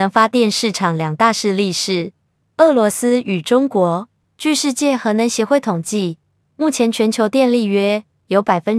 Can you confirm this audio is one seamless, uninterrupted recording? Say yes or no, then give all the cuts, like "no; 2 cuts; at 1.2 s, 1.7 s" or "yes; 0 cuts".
yes; 0 cuts